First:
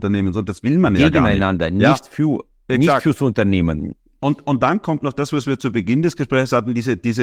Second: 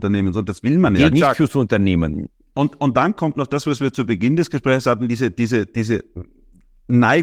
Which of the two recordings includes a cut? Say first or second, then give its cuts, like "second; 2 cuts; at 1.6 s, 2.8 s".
second; 1 cut; at 1.1 s